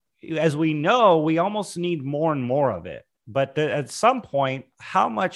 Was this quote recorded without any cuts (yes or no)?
yes